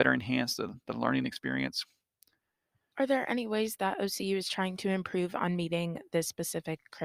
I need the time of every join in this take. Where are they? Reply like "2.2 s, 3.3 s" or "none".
2.9 s